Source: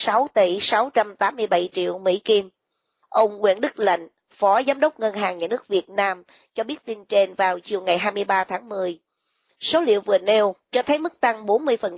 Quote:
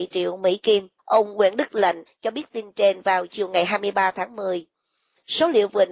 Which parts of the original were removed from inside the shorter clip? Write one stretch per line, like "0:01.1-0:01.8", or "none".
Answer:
0:02.6-0:03.0
0:04.1-0:06.4